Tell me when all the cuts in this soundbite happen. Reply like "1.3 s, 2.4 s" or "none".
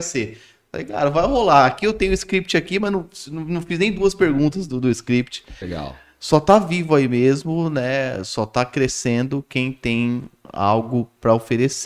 5.6 s